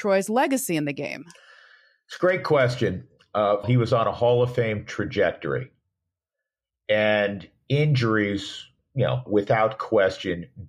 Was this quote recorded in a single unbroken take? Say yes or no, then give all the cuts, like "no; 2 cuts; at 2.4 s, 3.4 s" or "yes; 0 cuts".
no; 2 cuts; at 3.6 s, 9.3 s